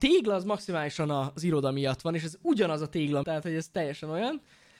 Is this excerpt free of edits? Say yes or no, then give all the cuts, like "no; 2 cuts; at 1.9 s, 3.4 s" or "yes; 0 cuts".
no; 1 cut; at 3.2 s